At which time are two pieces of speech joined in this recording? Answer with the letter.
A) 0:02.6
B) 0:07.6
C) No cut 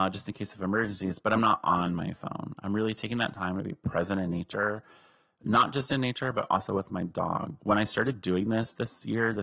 B